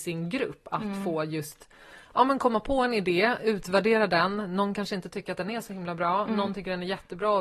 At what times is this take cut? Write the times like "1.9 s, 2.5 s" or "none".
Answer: none